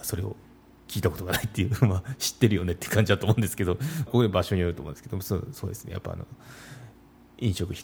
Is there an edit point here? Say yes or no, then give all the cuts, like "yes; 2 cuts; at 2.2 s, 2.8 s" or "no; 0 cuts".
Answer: yes; 1 cut; at 4.1 s